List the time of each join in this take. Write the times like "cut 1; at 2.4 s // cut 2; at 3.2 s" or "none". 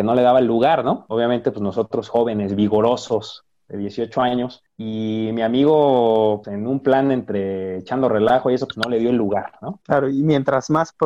cut 1; at 6.4 s // cut 2; at 9.8 s